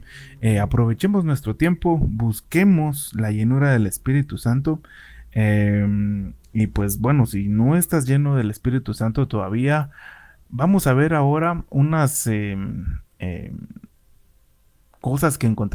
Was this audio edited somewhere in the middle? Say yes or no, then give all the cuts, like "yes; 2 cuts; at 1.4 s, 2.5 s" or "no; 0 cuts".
yes; 1 cut; at 10.5 s